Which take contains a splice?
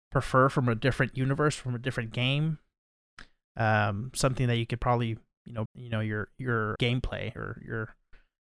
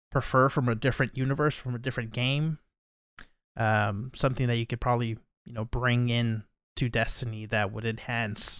first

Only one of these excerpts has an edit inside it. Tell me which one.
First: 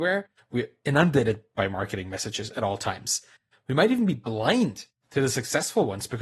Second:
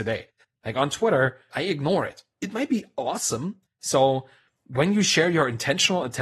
second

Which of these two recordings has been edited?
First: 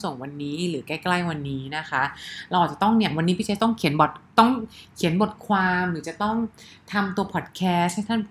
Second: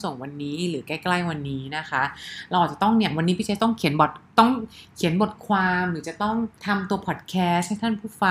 second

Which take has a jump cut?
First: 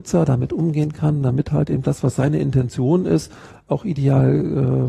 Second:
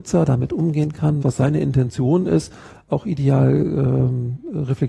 second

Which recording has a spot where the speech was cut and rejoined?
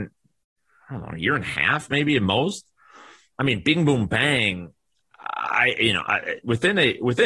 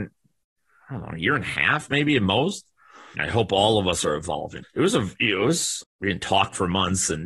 second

